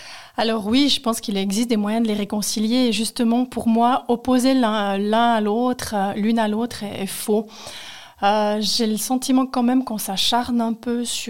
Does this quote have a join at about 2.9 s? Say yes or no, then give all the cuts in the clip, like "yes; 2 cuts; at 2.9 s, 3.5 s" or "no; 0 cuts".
no; 0 cuts